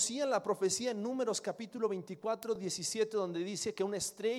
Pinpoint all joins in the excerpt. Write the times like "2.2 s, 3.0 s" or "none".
none